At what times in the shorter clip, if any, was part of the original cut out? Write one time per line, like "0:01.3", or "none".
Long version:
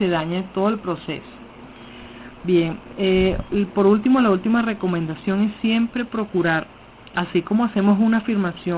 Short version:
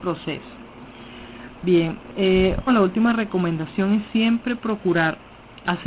0:02.7